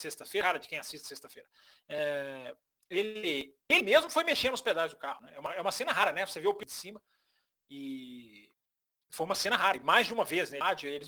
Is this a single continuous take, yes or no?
yes